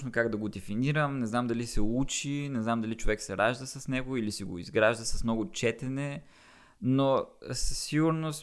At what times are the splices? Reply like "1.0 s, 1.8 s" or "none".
none